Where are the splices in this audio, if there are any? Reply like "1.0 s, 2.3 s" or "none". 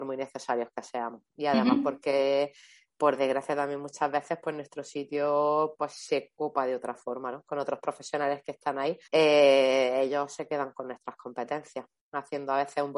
9.1 s